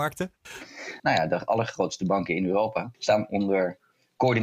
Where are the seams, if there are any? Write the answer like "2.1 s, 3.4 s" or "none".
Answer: 1.0 s, 2.9 s